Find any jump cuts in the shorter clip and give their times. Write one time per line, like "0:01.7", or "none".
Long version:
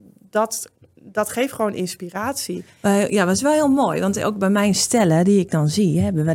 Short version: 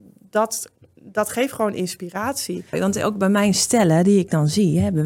0:02.7

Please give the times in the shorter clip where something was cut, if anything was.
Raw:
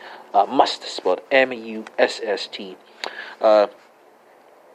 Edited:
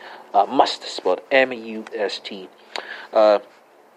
0:01.9

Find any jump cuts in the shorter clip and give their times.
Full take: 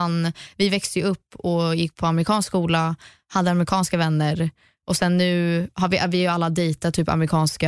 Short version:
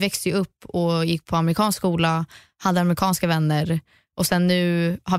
none

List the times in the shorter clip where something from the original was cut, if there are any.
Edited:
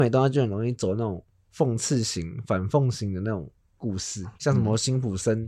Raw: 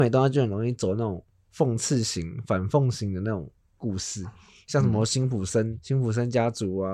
0:04.3

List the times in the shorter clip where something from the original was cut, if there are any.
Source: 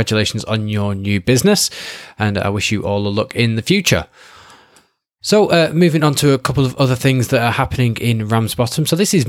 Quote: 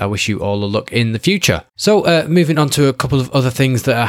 0:01.7

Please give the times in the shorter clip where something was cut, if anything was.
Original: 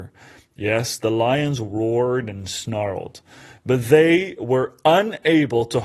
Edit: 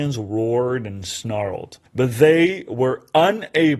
0:01.9

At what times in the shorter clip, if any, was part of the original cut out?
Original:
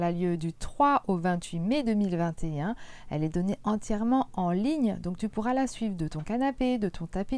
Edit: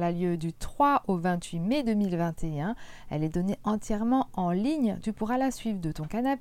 0:05.0

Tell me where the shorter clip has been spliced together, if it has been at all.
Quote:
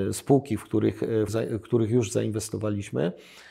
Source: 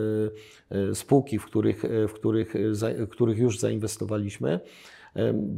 0:01.3

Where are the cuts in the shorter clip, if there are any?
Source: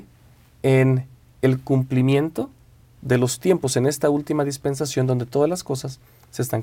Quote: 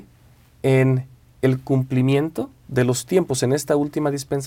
0:02.6

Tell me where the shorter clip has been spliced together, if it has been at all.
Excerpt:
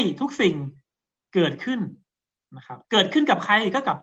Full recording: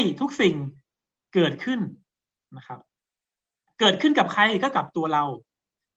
0:02.8

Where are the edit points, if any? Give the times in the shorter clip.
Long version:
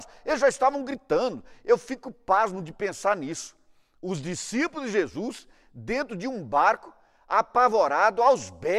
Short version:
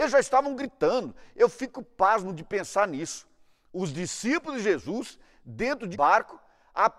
0:05.9

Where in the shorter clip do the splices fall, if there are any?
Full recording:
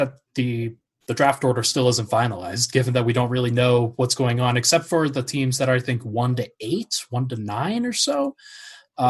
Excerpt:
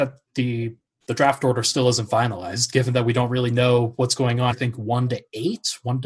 0:04.5

